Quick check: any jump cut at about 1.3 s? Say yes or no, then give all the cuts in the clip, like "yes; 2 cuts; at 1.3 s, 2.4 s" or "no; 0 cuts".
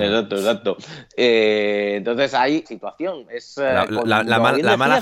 no; 1 cut; at 2.6 s